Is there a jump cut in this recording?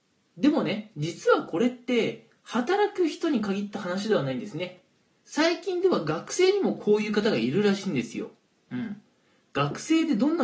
no; 0 cuts

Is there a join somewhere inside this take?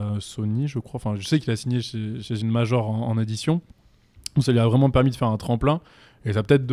no; 0 cuts

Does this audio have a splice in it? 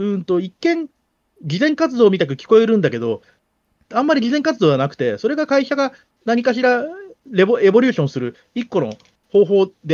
no; 0 cuts

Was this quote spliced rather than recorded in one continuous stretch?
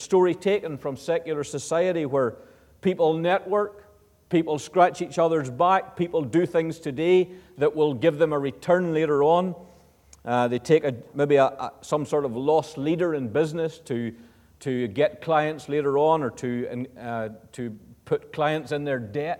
yes; 1 cut; at 11.1 s

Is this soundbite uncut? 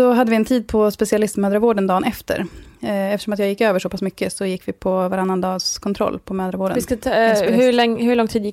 yes; 0 cuts

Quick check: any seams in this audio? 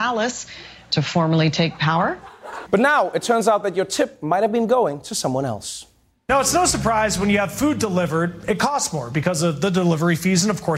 yes; 1 cut; at 2.7 s

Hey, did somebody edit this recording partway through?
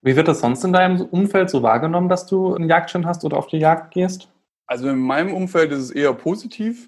yes; 1 cut; at 2.5 s

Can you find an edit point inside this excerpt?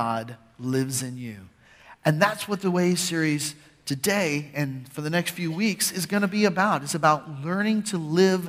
no; 0 cuts

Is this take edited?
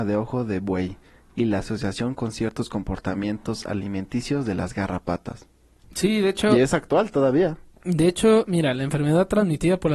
yes; 1 cut; at 5.8 s

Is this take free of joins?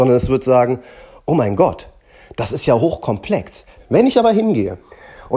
no; 1 cut; at 3.8 s

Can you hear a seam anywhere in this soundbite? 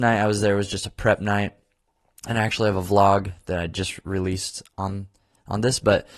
no; 0 cuts

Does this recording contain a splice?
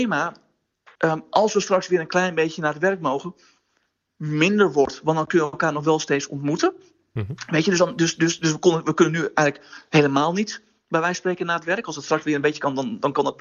no; 0 cuts

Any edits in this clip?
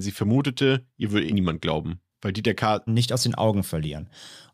yes; 2 cuts; at 1.3 s, 2.9 s

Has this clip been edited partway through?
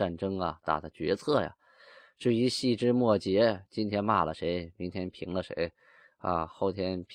no; 0 cuts

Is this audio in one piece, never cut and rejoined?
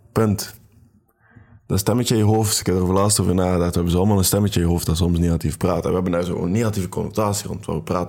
yes; 0 cuts

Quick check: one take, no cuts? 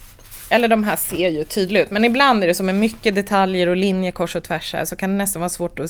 yes; 0 cuts

